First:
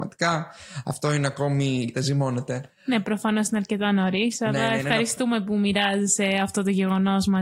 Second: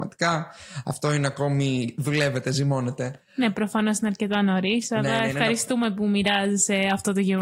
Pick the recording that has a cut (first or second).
first